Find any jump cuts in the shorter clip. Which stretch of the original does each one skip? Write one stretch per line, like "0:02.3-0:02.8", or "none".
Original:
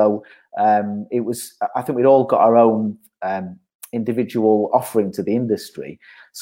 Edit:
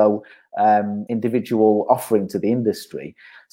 0:01.1-0:03.9